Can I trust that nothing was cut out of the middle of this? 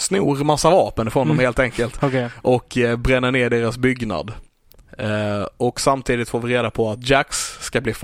yes; 0 cuts

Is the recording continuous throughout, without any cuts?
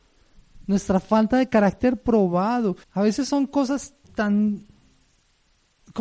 no; 2 cuts; at 2.8 s, 4.0 s

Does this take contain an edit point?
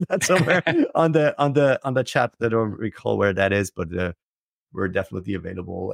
no; 0 cuts

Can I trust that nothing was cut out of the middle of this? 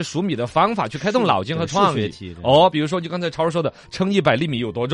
yes; 0 cuts

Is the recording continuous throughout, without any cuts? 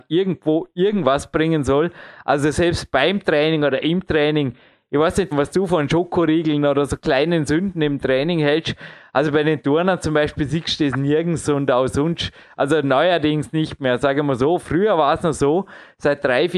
no; 1 cut; at 5.3 s

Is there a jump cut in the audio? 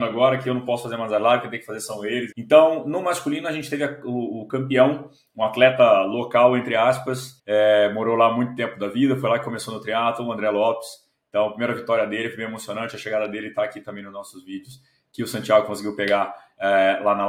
yes; 2 cuts; at 2.3 s, 7.4 s

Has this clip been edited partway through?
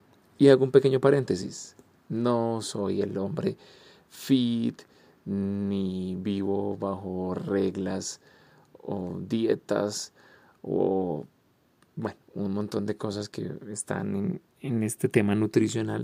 no; 0 cuts

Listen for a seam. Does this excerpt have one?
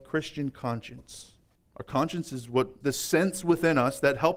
yes; 2 cuts; at 1.6 s, 2.8 s

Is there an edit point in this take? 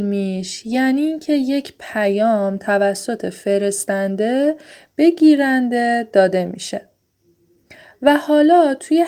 no; 0 cuts

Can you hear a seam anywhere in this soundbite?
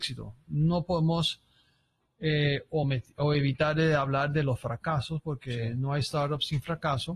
no; 0 cuts

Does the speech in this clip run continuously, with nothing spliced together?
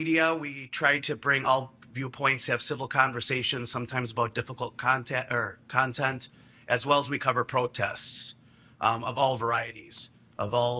yes; 0 cuts

